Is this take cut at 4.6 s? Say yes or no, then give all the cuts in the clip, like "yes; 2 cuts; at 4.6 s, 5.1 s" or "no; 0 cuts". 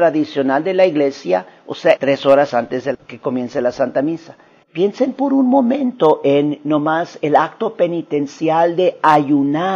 yes; 2 cuts; at 2.0 s, 4.6 s